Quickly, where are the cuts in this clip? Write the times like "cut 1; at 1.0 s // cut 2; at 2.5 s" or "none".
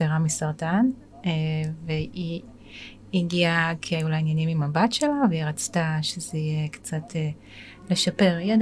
none